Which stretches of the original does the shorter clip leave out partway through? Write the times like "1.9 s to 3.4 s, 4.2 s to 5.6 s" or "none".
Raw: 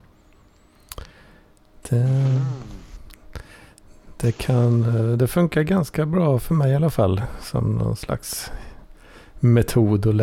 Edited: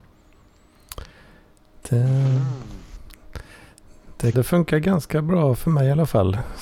4.3 s to 5.2 s